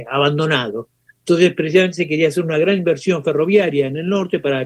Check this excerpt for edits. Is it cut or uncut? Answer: uncut